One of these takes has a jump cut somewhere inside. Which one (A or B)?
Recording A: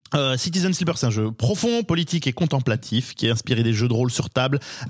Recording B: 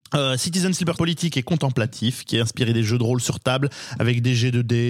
B